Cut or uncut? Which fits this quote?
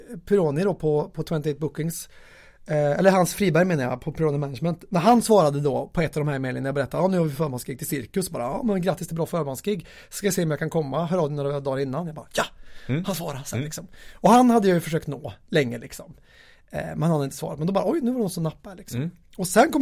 uncut